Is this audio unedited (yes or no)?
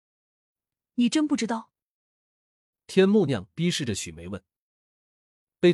no